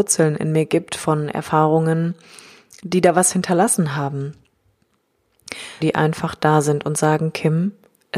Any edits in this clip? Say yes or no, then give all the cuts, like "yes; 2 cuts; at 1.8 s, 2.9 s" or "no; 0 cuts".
yes; 1 cut; at 5.8 s